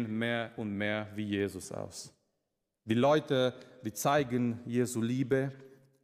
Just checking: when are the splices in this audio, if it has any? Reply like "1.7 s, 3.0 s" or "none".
none